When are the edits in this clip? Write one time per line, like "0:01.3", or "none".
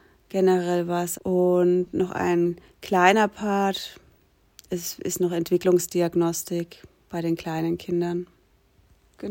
0:01.1